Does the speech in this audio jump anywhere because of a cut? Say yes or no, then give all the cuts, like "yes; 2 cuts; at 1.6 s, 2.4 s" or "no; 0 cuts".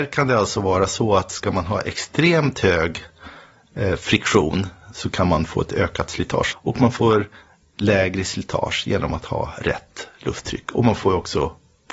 yes; 1 cut; at 6.5 s